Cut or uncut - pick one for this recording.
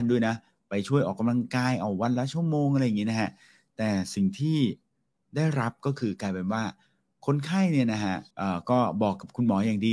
cut